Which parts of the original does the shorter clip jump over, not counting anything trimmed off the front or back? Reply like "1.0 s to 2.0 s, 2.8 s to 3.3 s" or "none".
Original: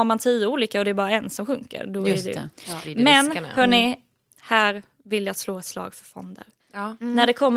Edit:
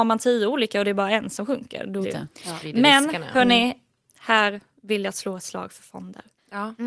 2.0 s to 2.2 s